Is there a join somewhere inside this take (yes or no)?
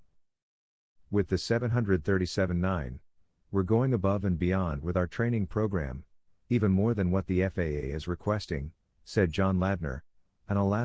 no